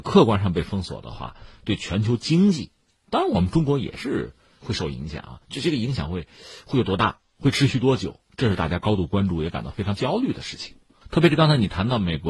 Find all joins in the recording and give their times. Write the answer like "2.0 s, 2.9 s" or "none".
none